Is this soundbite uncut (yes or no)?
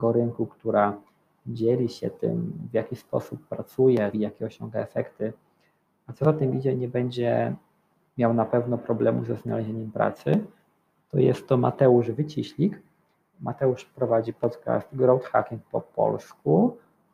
no